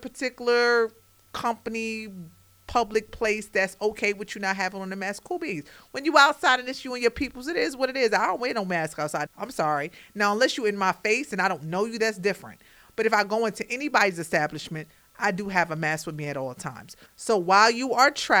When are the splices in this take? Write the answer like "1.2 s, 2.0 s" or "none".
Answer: 9.3 s, 12.9 s, 17.1 s